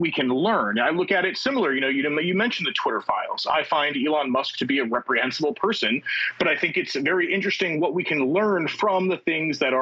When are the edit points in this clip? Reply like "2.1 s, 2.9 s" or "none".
none